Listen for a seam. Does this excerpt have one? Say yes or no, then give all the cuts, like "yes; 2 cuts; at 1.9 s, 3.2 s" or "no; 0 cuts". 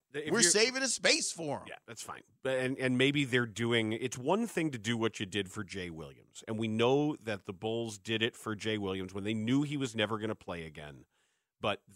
no; 0 cuts